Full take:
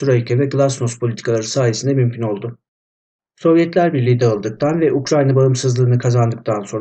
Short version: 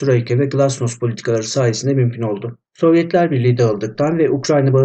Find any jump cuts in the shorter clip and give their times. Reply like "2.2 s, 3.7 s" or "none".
2.7 s